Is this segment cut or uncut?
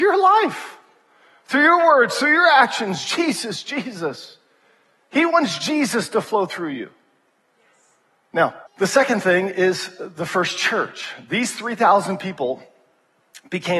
cut